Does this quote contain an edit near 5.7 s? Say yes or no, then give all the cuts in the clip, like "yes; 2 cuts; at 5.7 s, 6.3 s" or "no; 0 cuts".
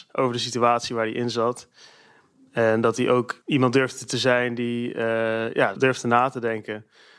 yes; 1 cut; at 5.7 s